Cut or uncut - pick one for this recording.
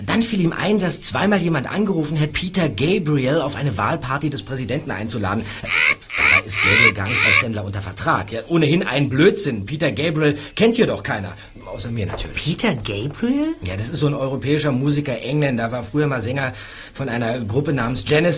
cut